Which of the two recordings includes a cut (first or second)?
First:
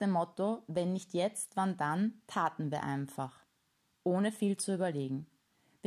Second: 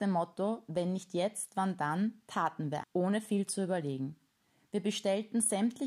second